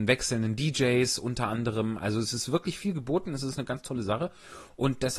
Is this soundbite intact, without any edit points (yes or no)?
yes